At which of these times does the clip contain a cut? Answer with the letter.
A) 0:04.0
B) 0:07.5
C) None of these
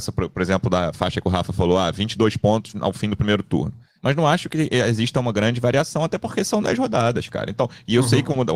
A